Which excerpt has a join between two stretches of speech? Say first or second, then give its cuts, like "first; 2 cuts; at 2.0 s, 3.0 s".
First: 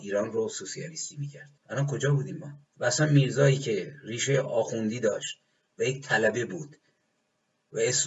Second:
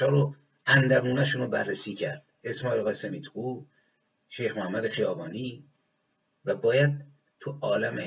first; 2 cuts; at 1.6 s, 2.7 s